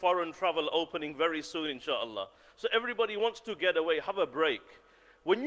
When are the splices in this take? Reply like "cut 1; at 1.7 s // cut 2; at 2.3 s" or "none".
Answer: none

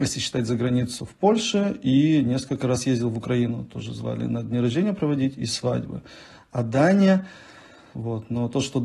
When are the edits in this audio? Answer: cut 1; at 7.9 s

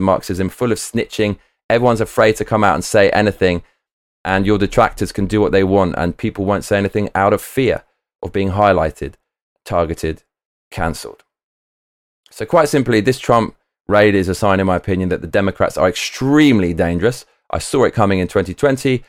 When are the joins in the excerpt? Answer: none

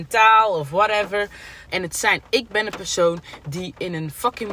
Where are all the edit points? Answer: cut 1; at 1.7 s

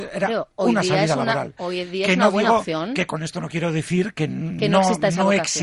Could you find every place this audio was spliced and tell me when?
none

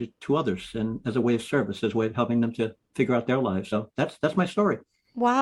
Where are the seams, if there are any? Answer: none

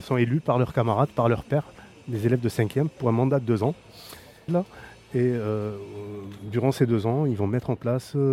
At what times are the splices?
cut 1; at 4.5 s

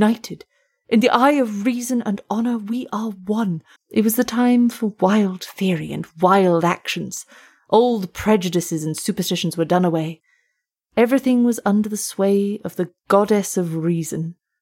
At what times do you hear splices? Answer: cut 1; at 3.8 s

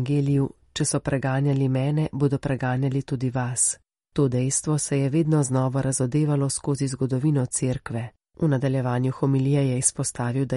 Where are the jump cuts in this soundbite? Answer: cut 1; at 4.0 s // cut 2; at 8.2 s

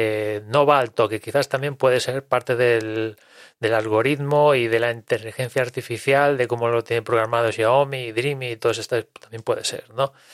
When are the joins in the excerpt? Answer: none

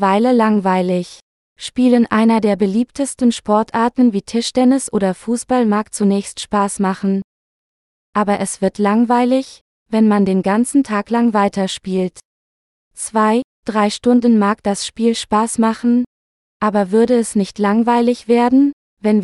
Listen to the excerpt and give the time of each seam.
none

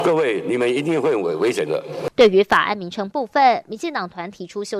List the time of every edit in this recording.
none

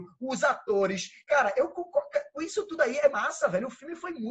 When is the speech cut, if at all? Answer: cut 1; at 3.1 s

